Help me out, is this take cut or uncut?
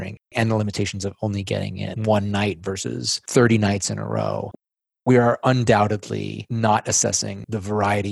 uncut